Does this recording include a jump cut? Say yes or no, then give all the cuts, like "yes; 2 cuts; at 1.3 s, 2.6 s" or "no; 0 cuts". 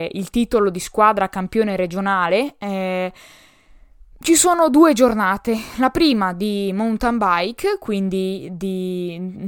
no; 0 cuts